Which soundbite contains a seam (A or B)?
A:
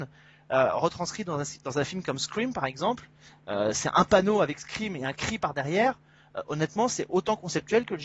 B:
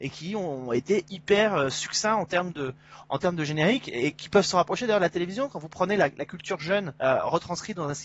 B